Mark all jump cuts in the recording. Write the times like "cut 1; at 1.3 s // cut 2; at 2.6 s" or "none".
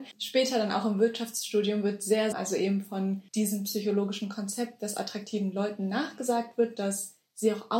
cut 1; at 2.3 s